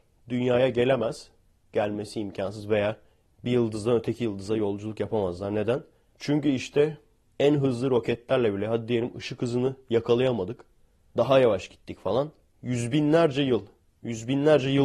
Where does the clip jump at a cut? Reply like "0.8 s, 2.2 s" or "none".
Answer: none